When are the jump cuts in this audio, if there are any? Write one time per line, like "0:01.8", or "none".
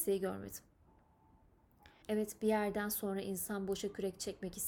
0:02.0